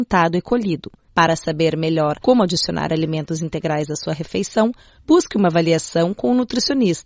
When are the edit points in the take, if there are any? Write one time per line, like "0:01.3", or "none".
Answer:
0:01.1
0:05.0